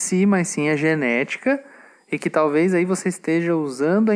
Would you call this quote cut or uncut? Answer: uncut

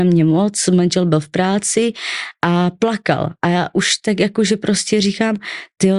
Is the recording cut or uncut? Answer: uncut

